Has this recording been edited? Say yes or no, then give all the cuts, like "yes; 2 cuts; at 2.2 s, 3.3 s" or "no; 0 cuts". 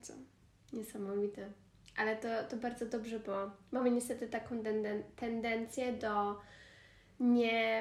no; 0 cuts